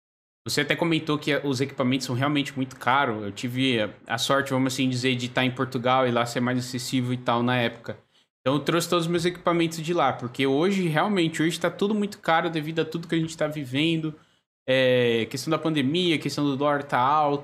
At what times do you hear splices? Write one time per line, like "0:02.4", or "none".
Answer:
none

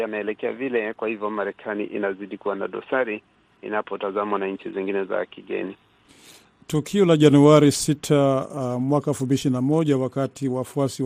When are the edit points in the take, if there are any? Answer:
0:05.1

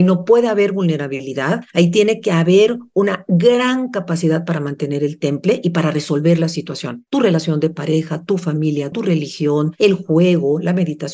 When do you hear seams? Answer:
0:07.1
0:08.9

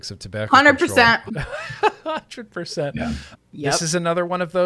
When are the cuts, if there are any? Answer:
0:01.3
0:03.3

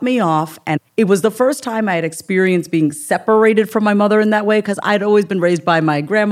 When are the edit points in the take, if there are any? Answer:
none

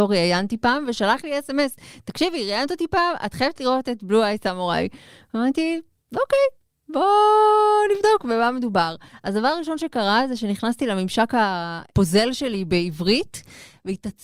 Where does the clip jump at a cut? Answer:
none

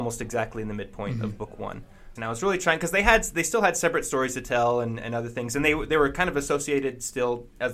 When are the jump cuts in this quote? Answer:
0:02.2

